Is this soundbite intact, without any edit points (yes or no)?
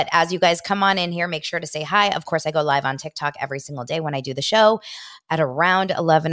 yes